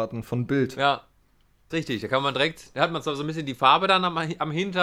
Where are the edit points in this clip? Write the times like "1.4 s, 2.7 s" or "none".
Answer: 1.7 s